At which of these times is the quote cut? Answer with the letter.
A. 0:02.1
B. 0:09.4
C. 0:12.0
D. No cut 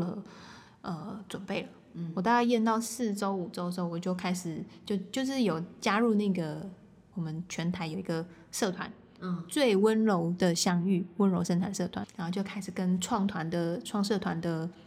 C